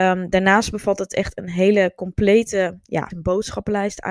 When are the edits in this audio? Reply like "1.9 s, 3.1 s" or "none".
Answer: 3.1 s